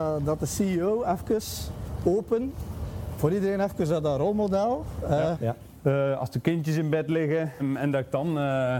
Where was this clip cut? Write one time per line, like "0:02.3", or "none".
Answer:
0:05.3
0:07.6